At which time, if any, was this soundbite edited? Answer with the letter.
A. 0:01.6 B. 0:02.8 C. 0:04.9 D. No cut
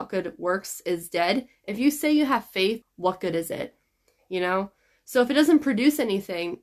B